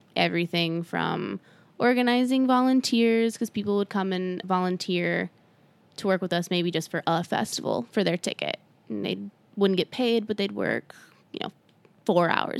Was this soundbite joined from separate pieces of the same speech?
yes; 1 cut; at 4.4 s

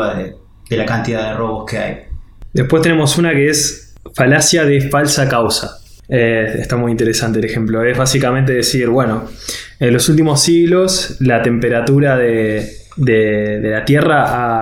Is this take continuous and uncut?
yes; 0 cuts

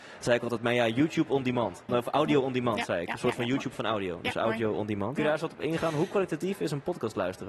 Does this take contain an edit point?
yes; 2 cuts; at 1.9 s, 5.2 s

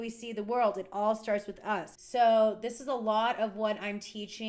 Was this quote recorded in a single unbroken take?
no; 1 cut; at 2.0 s

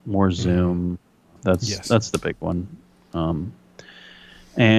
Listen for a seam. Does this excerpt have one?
yes; 1 cut; at 1.4 s

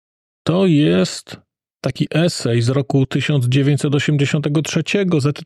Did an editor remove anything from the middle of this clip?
no; 0 cuts

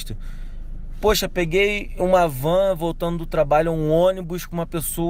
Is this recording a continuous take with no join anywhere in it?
yes; 0 cuts

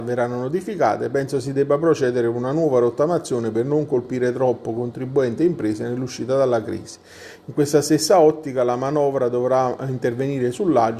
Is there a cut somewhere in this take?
no; 0 cuts

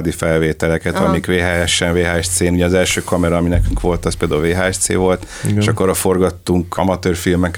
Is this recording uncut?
yes; 0 cuts

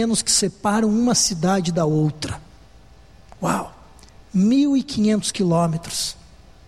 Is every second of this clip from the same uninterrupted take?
yes; 0 cuts

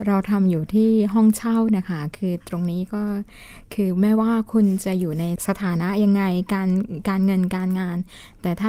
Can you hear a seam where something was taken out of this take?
no; 0 cuts

